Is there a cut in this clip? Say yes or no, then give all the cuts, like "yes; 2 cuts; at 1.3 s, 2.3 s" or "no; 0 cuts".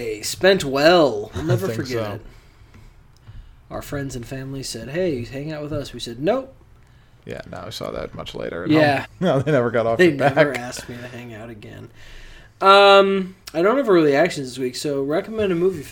yes; 3 cuts; at 7.2 s, 9.0 s, 13.4 s